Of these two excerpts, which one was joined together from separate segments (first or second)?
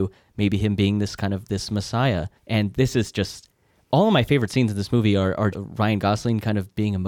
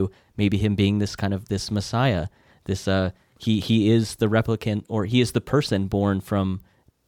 first